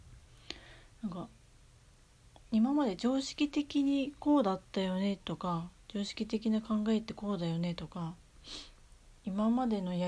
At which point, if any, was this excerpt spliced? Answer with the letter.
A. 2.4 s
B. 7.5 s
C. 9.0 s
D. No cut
A